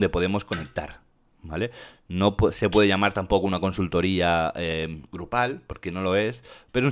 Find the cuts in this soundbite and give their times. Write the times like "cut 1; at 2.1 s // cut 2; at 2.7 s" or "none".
none